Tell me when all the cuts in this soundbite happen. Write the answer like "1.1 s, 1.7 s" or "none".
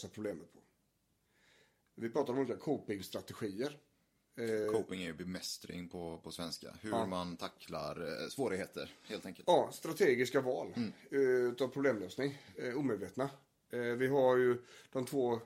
none